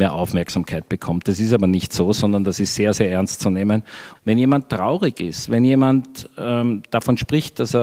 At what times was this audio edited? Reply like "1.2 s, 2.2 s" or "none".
4.2 s